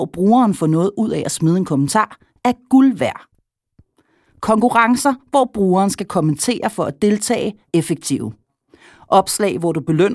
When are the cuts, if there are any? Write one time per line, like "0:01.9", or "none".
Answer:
0:07.7